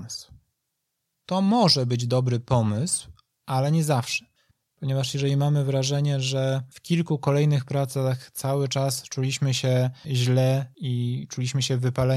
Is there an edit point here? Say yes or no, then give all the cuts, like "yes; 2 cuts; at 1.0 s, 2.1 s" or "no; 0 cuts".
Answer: no; 0 cuts